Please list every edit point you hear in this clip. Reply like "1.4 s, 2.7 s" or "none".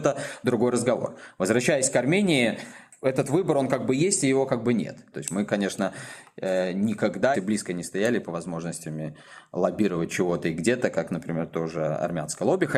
5.1 s, 7.3 s